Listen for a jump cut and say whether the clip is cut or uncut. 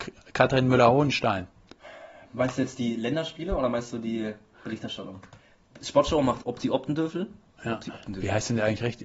cut